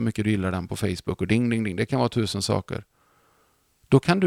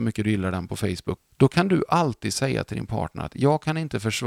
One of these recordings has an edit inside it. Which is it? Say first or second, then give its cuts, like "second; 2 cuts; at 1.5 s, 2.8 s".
second; 1 cut; at 1.2 s